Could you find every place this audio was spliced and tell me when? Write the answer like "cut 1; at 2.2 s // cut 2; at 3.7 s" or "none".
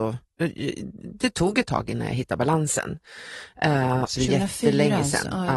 cut 1; at 4.0 s